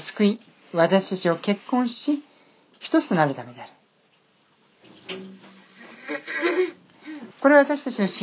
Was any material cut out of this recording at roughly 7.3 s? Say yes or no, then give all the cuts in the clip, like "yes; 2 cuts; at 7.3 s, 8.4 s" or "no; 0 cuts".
yes; 1 cut; at 7.3 s